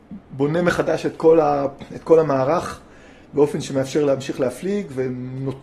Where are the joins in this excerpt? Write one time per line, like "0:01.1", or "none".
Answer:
none